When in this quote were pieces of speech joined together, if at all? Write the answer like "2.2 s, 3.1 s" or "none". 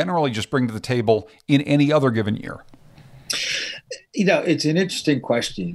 none